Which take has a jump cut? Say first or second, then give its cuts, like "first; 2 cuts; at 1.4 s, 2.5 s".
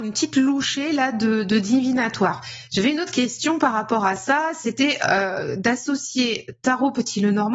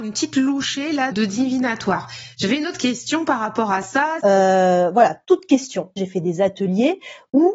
second; 3 cuts; at 1.1 s, 4.2 s, 6.0 s